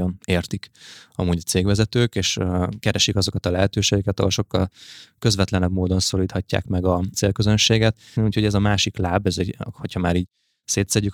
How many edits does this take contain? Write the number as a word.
one